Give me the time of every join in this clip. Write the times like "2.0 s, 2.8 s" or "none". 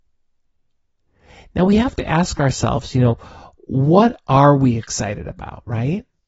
none

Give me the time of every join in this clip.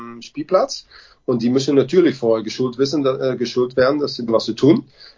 4.3 s

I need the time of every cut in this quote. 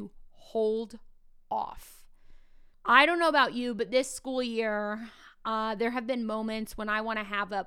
2.7 s

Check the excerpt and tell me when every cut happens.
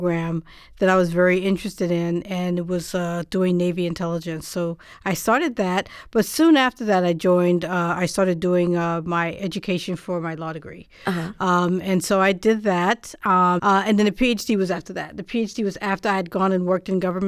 13.6 s

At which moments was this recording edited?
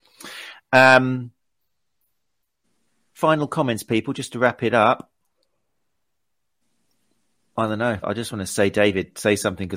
8.0 s

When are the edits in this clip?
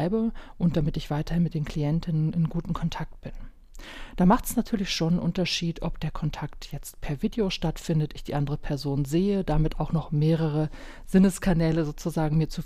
none

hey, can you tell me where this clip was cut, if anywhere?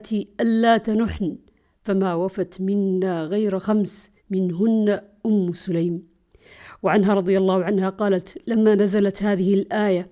4.2 s

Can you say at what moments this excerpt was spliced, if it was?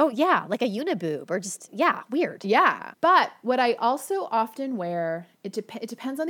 2.9 s

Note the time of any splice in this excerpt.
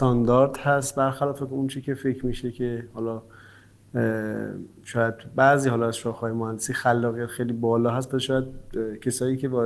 none

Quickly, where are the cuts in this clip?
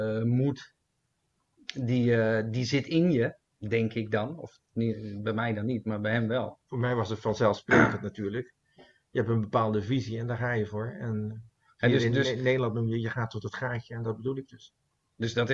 none

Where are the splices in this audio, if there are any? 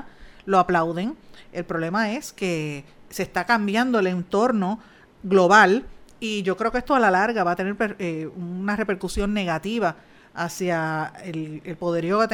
none

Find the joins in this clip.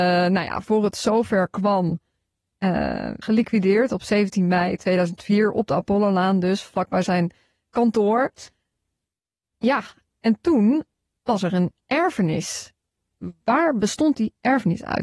3.2 s

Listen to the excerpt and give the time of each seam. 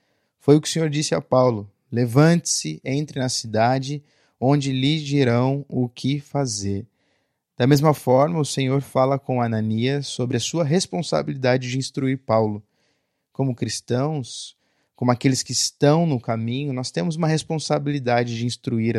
none

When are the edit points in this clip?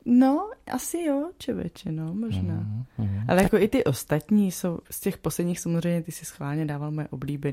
4.8 s

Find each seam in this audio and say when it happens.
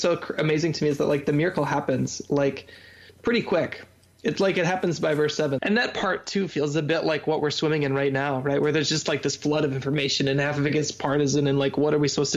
5.6 s

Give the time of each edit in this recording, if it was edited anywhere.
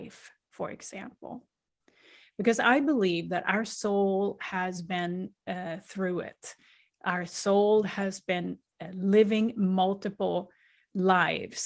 none

